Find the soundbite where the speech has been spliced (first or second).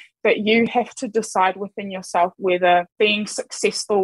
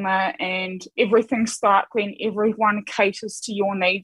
first